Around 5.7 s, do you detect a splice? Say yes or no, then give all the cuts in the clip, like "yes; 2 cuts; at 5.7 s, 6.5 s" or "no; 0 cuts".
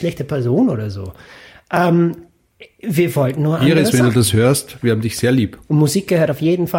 yes; 1 cut; at 5.7 s